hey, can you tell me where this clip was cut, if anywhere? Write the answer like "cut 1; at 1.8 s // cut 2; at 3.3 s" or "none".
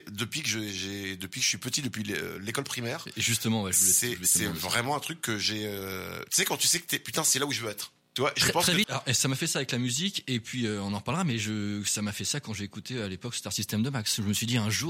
cut 1; at 8.8 s